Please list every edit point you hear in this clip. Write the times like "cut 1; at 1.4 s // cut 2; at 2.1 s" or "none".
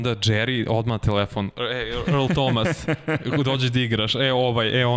none